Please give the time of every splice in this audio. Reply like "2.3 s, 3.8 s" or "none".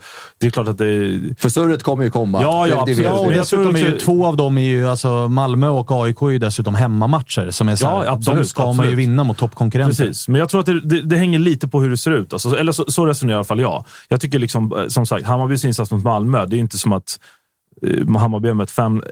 none